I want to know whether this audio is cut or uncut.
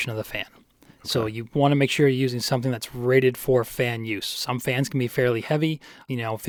uncut